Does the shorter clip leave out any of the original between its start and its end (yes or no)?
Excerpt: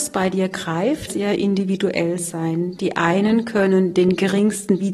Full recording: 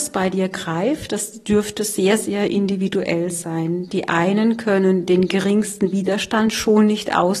yes